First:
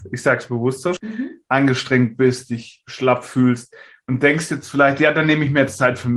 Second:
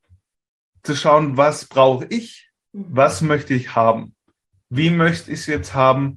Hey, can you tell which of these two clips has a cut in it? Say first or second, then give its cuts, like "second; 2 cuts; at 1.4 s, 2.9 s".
first; 1 cut; at 1.0 s